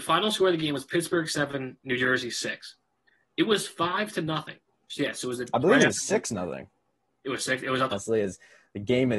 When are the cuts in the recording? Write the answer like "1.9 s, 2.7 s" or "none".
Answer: 4.9 s, 7.9 s